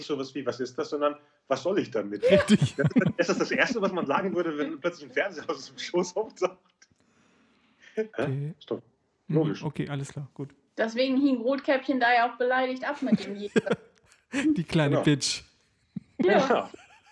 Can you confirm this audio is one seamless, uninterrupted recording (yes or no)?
no